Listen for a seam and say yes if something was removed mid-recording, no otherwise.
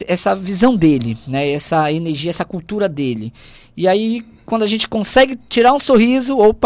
no